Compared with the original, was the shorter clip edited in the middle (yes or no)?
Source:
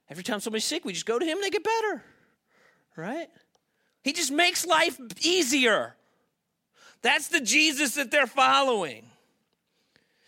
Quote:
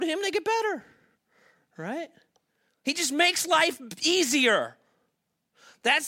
no